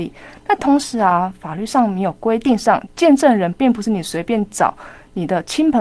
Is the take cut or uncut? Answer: uncut